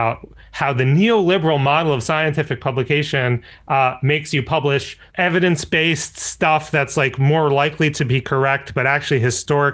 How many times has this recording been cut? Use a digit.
1